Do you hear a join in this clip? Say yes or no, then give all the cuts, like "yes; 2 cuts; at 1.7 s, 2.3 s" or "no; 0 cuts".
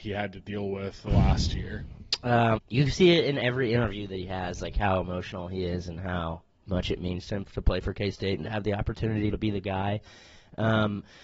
yes; 2 cuts; at 2.6 s, 9.3 s